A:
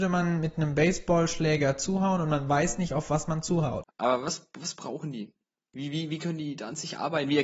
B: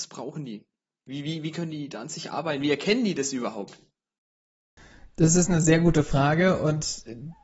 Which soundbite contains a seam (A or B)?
A